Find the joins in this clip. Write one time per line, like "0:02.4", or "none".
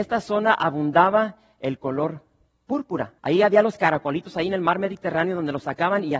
0:03.2